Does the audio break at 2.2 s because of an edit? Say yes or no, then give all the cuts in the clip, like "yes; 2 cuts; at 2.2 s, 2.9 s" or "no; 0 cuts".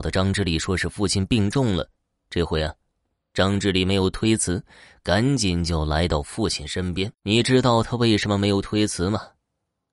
no; 1 cut; at 7.1 s